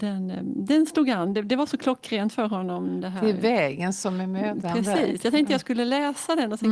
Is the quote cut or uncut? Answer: uncut